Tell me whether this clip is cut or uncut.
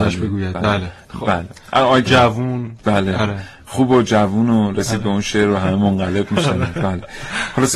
cut